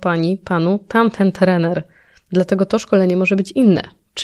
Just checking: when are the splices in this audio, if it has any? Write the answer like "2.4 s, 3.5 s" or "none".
none